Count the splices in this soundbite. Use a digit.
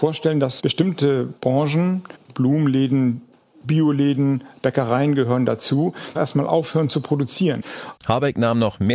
2